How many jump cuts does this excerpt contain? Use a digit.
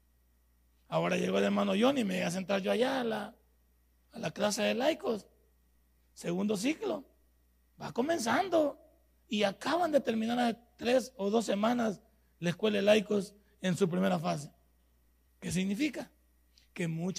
1